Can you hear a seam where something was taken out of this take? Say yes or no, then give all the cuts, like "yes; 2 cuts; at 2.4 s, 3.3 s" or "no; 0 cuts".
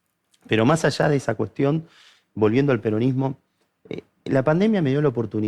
no; 0 cuts